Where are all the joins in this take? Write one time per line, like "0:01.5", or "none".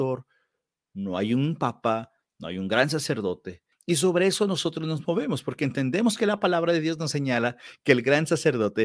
0:03.7